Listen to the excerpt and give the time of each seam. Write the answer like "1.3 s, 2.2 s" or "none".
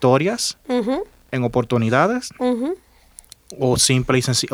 none